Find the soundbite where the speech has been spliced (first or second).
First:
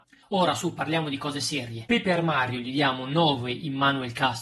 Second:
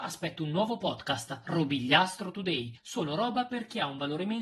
first